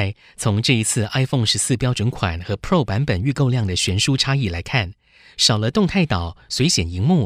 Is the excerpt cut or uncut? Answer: uncut